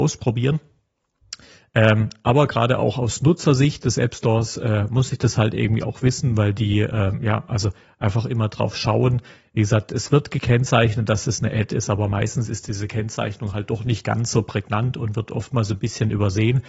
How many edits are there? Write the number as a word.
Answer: zero